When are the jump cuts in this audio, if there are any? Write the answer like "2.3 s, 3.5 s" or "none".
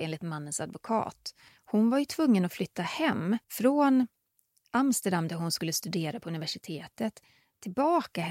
1.5 s, 3.4 s